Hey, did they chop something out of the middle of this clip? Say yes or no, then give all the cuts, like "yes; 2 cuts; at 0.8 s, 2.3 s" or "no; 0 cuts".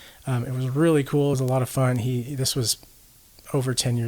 no; 0 cuts